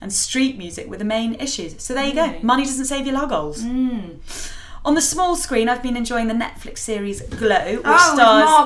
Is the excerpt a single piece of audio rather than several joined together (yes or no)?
yes